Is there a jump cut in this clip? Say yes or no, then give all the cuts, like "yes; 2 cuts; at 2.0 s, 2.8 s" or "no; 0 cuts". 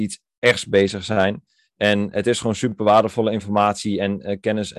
no; 0 cuts